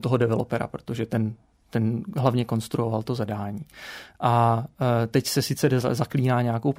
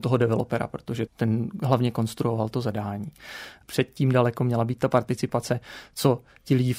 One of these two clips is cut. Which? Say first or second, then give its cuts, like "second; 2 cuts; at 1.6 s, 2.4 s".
second; 2 cuts; at 1.1 s, 3.6 s